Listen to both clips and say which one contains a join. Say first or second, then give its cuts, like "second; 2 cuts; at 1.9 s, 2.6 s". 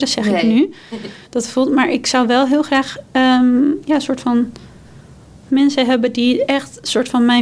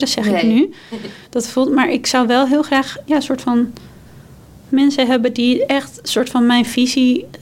second; 1 cut; at 3.1 s